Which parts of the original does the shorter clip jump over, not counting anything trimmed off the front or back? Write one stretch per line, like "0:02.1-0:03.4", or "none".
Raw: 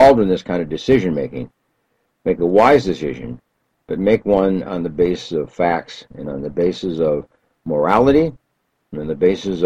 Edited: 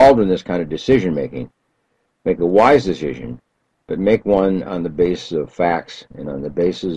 none